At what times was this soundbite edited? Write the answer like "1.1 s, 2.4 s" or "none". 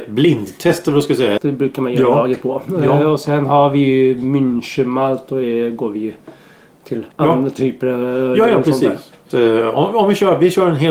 1.4 s, 7.1 s, 9.3 s